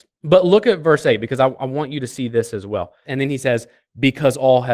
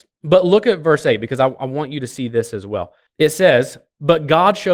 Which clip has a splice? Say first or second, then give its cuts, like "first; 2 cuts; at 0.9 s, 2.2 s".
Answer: first; 1 cut; at 3.0 s